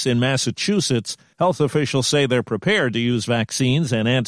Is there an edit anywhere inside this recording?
no; 0 cuts

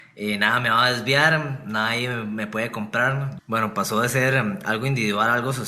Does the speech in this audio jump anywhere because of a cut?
yes; 1 cut; at 3.4 s

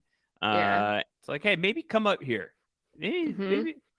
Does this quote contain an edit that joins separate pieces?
yes; 1 cut; at 1.1 s

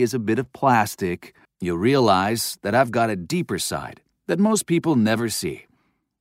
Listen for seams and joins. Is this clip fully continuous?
no; 1 cut; at 1.4 s

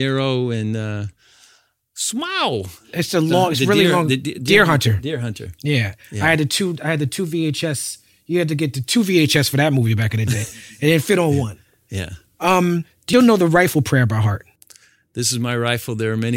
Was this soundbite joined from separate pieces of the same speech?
yes; 1 cut; at 13.1 s

